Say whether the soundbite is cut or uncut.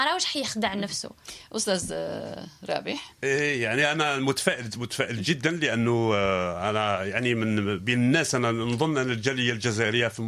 cut